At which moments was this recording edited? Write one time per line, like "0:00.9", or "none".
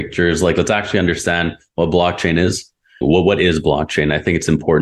0:03.0